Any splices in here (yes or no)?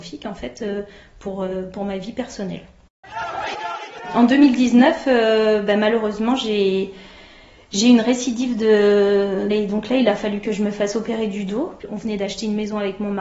yes